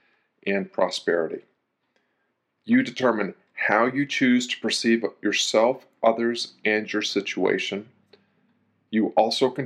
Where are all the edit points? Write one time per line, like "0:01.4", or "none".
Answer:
0:02.6